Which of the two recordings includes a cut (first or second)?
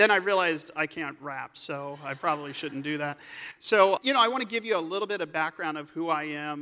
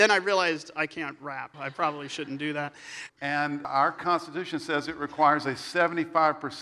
second